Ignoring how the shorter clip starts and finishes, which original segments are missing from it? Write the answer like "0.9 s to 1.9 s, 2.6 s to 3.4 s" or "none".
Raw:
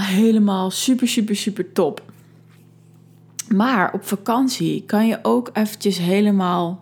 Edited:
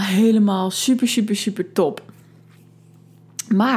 none